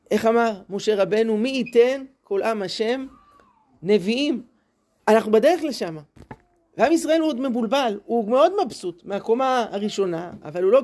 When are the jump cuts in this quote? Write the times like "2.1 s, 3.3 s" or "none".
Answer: 5.0 s